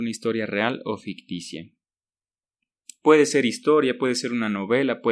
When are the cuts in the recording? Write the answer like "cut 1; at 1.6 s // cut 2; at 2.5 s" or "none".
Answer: none